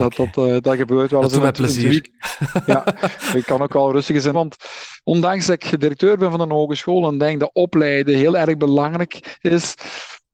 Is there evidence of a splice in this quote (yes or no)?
yes